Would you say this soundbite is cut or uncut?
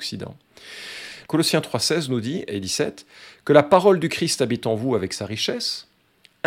cut